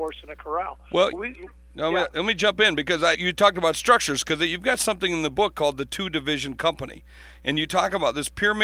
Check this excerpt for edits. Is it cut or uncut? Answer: cut